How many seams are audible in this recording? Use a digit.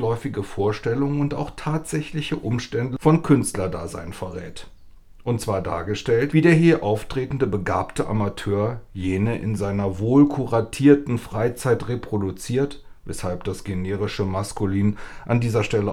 0